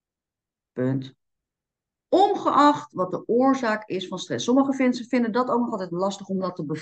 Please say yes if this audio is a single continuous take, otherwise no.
yes